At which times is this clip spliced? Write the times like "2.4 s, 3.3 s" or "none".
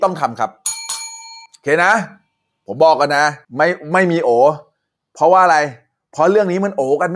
1.5 s, 3.4 s